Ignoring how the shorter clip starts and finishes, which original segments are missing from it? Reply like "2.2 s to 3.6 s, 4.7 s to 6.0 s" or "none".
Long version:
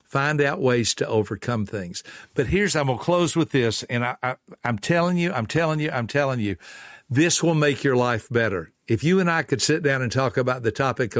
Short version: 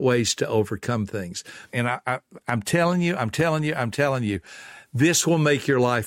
2.3 s to 3.9 s

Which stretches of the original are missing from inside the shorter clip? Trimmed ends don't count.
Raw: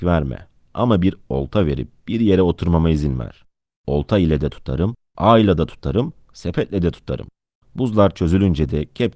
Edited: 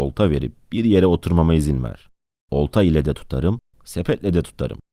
5.1 s to 6.2 s

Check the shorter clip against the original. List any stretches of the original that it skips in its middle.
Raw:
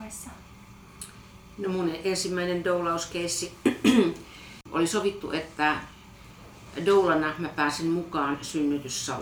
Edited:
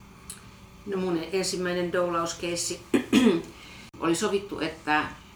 none

